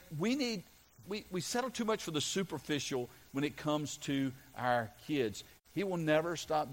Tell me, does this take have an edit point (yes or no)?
yes